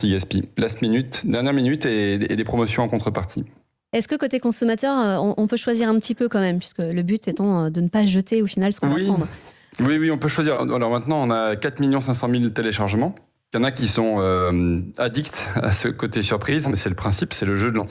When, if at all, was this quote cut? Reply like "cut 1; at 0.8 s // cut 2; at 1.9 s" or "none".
cut 1; at 10.5 s // cut 2; at 16.6 s